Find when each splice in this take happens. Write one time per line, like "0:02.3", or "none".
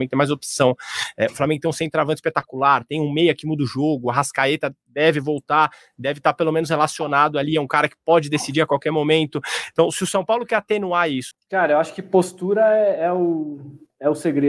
0:11.3